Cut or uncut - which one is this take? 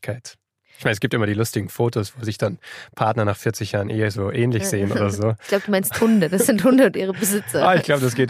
uncut